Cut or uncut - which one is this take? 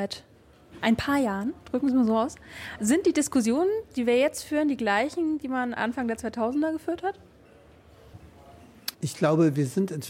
cut